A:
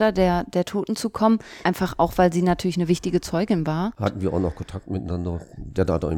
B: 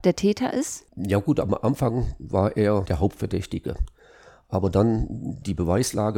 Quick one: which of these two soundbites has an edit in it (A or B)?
A